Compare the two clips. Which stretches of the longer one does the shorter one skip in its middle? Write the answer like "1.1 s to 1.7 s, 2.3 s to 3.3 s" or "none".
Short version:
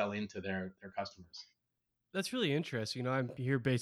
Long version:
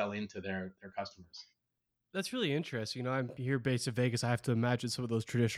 none